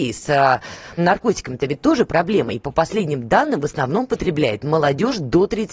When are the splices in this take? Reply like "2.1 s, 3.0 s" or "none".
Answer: 1.0 s